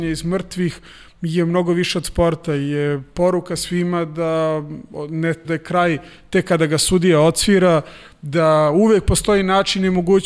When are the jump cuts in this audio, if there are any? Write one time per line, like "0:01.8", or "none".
0:05.4